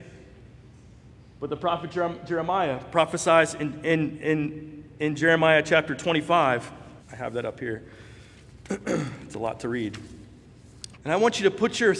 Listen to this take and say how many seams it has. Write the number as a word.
two